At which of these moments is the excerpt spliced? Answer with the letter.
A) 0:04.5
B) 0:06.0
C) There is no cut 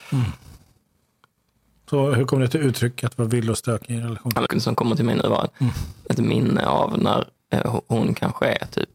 A